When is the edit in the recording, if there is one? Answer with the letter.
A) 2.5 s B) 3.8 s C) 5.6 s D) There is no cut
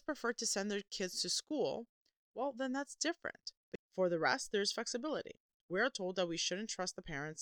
B